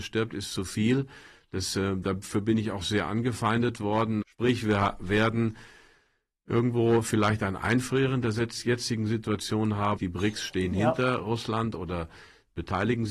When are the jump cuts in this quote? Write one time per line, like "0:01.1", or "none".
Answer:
0:04.2
0:10.0